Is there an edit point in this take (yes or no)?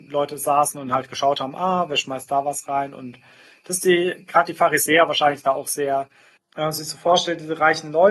yes